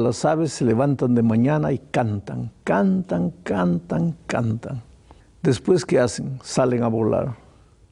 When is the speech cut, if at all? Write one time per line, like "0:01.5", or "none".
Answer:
0:05.2

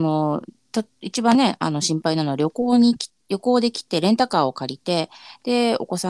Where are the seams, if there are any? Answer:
none

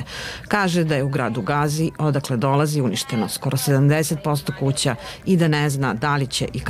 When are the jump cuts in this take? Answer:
none

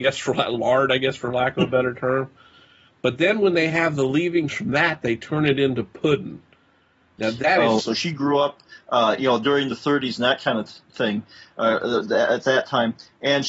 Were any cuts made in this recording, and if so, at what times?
0:07.8

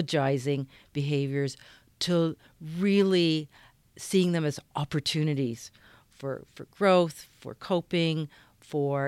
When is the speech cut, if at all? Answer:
none

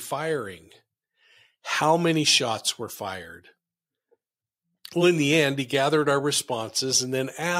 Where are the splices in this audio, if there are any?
none

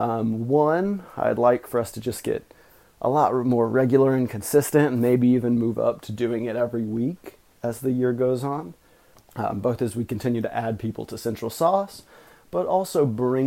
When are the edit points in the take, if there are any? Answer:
0:09.1

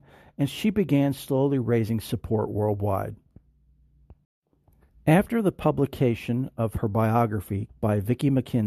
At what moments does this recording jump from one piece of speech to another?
0:07.7

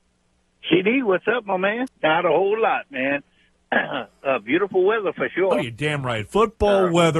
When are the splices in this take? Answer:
0:01.9

